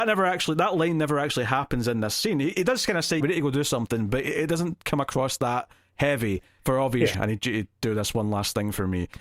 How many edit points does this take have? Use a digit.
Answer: 2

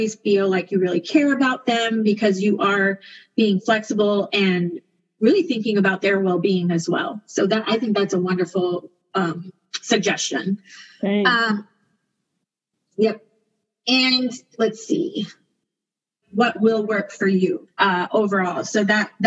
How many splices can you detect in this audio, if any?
2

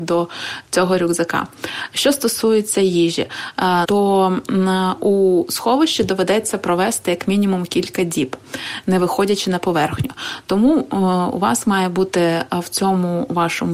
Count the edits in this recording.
1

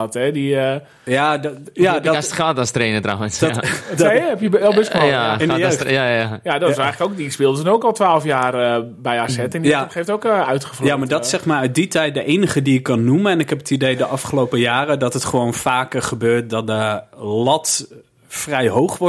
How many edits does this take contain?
0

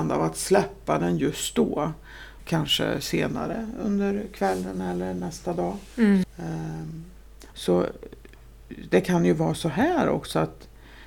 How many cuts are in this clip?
3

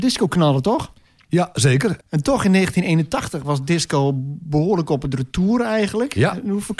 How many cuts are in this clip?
1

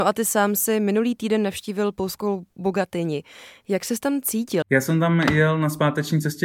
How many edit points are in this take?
1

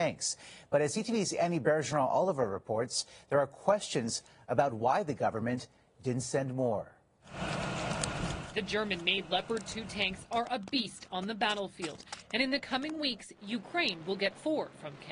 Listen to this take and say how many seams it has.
0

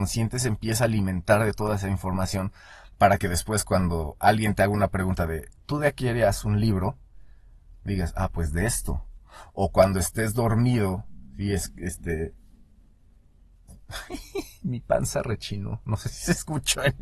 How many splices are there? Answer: 0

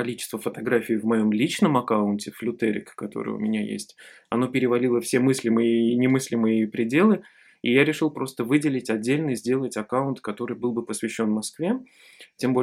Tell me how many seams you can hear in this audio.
0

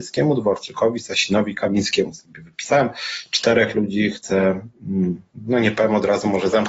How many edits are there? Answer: 0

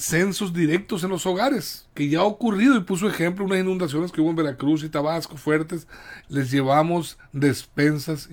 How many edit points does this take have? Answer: 2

